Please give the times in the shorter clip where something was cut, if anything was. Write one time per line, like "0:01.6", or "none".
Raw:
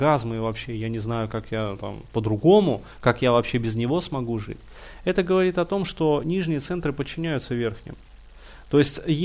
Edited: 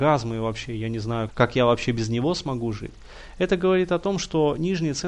0:01.3